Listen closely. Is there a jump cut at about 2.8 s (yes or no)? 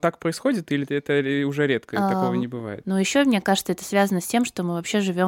yes